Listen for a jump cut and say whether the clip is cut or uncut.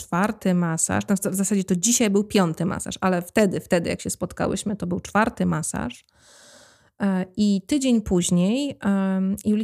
uncut